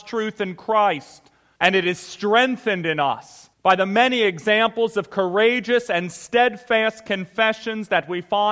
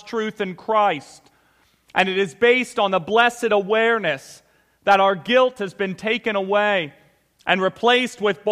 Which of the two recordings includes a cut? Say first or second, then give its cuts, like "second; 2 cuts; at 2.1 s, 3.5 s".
first; 2 cuts; at 1.6 s, 3.5 s